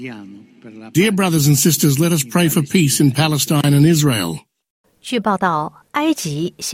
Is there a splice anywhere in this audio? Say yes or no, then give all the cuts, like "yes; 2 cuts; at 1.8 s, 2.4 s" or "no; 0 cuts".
no; 0 cuts